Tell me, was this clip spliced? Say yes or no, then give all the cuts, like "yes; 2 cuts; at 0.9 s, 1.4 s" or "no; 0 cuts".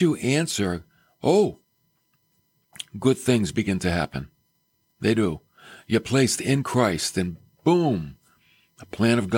no; 0 cuts